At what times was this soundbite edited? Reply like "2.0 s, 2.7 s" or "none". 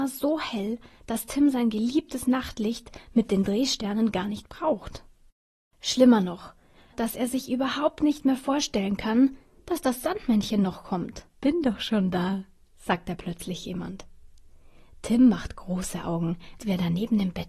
6.9 s, 11.3 s, 16.6 s

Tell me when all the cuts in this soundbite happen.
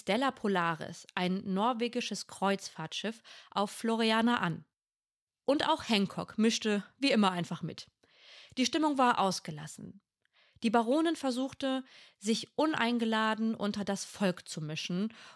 none

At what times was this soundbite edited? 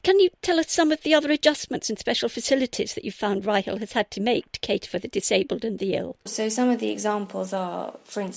6.3 s

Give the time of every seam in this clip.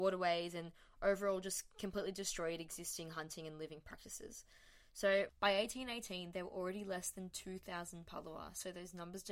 none

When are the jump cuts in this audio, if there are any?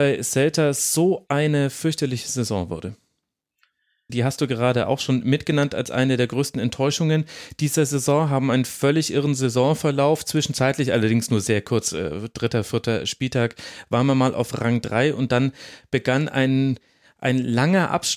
4.1 s

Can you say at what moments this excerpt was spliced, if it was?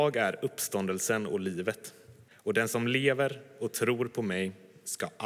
2.3 s

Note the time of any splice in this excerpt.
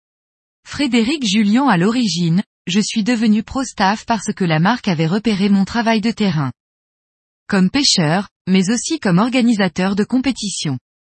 2.6 s

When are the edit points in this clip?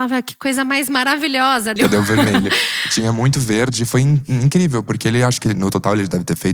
1.8 s

